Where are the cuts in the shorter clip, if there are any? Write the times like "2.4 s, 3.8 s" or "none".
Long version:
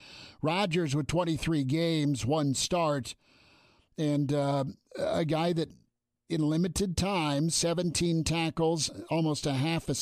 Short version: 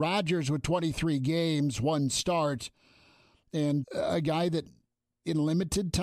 3.8 s